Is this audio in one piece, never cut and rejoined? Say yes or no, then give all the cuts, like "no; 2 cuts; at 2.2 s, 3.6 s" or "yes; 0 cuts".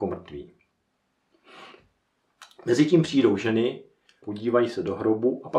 no; 1 cut; at 4.2 s